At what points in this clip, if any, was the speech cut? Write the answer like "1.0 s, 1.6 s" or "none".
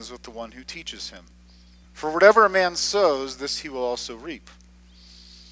1.8 s